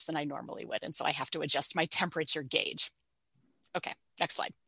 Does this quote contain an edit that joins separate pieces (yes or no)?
no